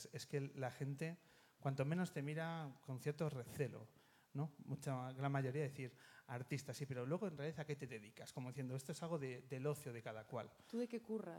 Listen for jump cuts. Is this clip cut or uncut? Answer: uncut